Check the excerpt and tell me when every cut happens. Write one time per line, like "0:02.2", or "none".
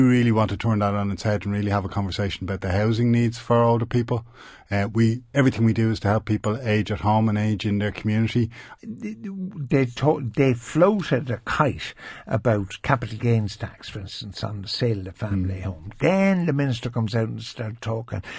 0:08.8